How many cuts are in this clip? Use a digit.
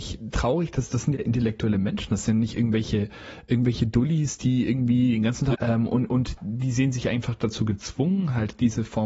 1